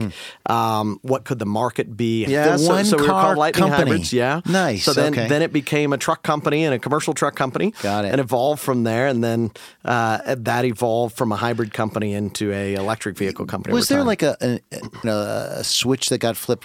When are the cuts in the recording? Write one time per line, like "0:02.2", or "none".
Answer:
0:02.3
0:15.0